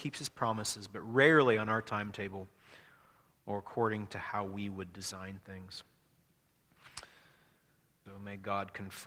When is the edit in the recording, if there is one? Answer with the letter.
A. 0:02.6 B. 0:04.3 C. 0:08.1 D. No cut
C